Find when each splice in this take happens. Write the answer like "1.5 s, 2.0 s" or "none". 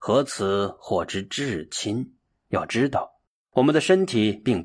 2.3 s

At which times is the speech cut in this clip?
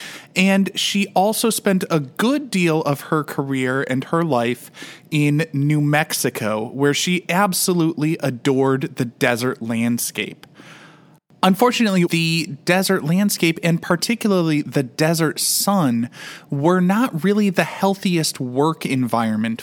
12.1 s

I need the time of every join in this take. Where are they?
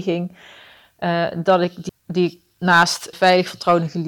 1.9 s, 3.1 s

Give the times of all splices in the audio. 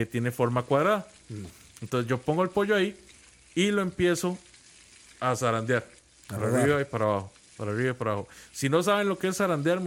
none

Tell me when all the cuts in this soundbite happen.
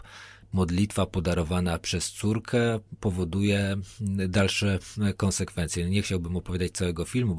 none

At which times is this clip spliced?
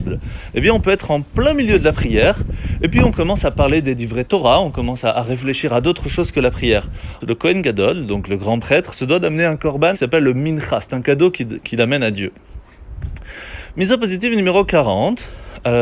7.2 s, 9.9 s

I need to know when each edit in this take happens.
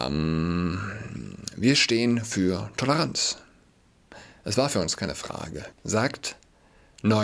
5.7 s

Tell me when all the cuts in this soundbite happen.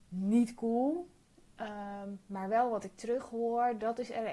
none

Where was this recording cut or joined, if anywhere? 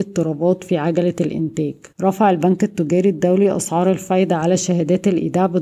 1.9 s

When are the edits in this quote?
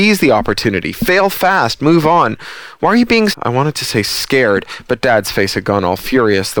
3.3 s

